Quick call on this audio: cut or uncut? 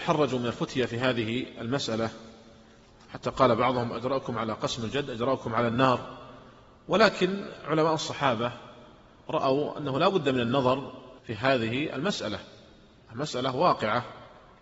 cut